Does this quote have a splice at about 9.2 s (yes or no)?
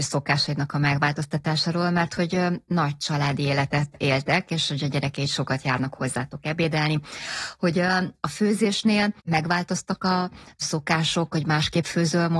yes